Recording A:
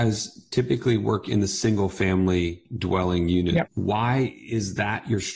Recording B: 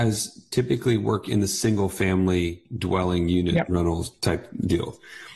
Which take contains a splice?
A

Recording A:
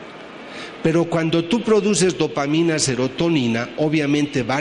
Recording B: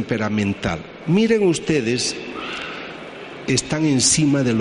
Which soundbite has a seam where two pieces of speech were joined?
B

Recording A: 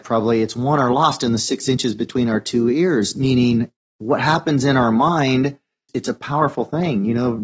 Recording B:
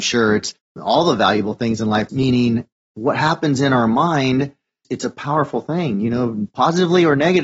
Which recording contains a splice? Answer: B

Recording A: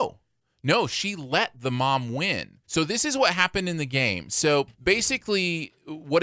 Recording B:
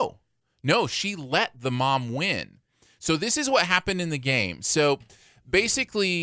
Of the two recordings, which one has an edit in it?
A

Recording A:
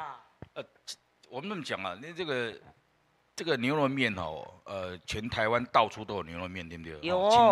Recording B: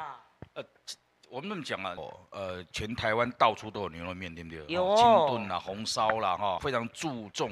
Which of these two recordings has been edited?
B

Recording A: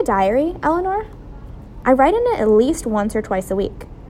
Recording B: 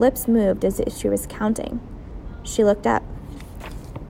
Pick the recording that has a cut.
A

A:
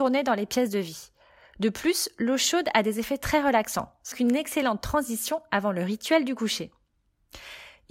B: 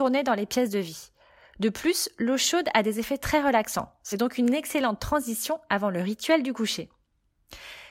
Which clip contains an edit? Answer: A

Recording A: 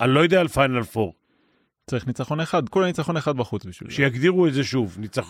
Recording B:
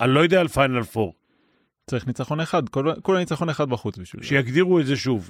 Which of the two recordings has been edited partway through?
A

